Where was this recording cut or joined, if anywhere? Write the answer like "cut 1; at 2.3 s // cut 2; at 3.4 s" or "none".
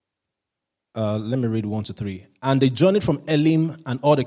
none